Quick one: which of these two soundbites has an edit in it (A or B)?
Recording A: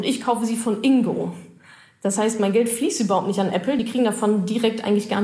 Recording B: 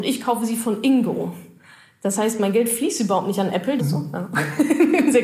B